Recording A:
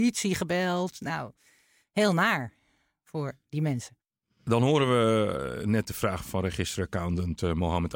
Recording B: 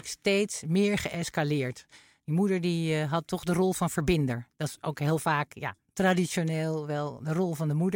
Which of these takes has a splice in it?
A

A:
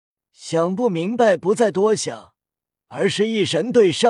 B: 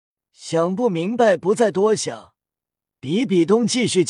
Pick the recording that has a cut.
A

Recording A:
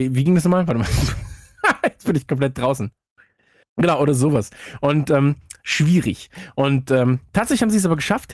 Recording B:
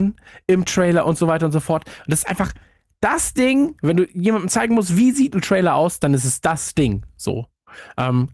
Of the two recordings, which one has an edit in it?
A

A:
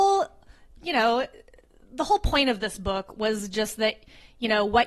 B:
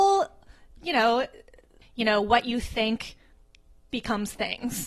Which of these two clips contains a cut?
B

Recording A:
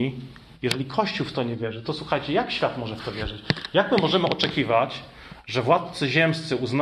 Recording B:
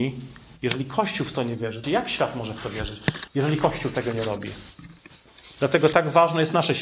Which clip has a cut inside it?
B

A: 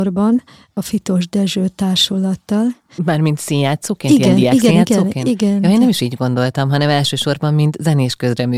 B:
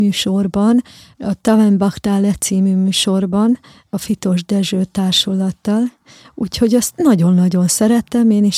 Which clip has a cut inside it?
A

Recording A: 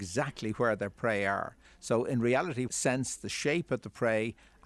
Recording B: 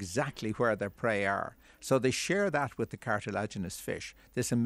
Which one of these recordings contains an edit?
A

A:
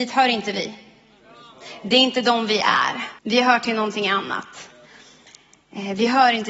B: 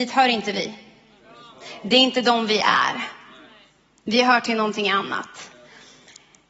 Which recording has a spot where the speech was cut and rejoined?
A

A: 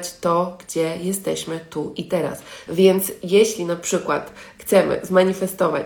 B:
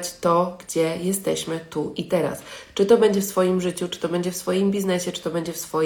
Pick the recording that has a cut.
A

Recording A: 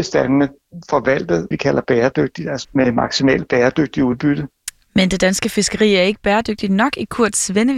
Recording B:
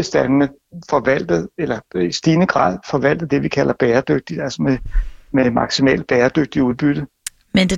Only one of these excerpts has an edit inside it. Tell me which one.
A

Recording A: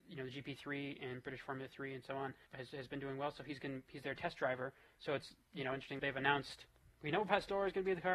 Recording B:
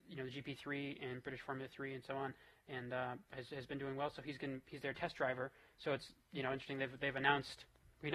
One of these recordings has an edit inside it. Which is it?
A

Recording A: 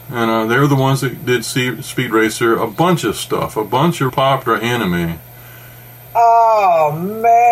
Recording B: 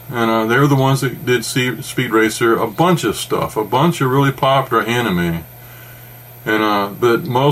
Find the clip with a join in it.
A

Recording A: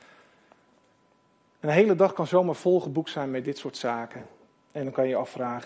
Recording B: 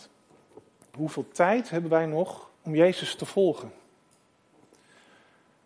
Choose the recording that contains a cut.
B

